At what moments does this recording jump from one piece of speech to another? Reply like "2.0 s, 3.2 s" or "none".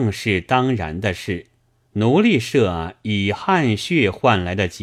1.9 s